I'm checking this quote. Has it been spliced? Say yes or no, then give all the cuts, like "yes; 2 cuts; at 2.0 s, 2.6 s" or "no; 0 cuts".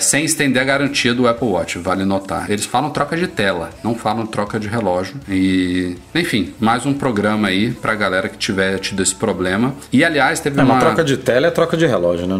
yes; 1 cut; at 2.5 s